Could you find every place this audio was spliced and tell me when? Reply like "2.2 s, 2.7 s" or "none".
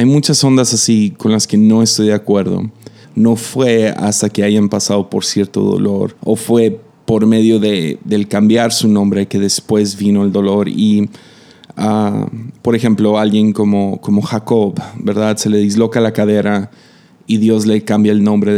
3.0 s, 6.2 s